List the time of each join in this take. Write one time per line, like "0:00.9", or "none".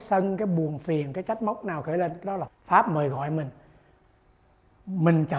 0:02.5